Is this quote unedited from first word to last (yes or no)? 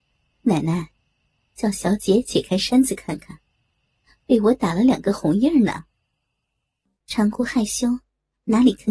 yes